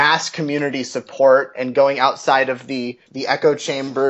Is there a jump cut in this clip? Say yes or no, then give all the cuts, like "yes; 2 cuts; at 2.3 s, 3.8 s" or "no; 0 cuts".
no; 0 cuts